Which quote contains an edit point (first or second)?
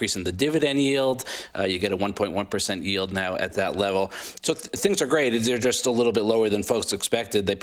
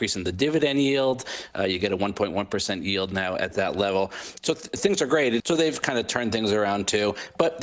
second